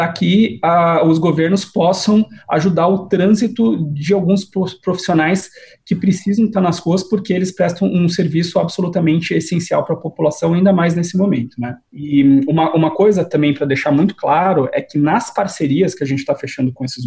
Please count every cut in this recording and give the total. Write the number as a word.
zero